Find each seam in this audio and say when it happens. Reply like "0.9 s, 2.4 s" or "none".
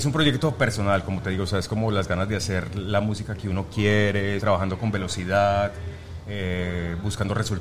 4.4 s